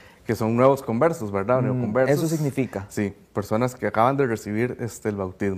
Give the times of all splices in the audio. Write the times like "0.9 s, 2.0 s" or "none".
none